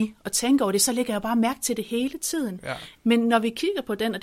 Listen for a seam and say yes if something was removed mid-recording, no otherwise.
yes